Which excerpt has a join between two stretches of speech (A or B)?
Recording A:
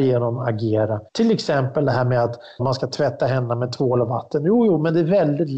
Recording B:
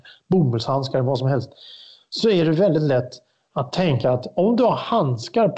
A